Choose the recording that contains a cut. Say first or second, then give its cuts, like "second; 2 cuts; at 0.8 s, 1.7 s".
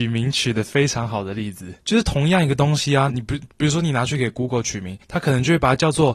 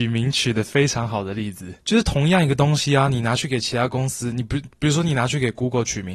first; 1 cut; at 3.1 s